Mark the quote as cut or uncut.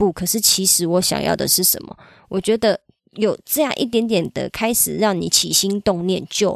uncut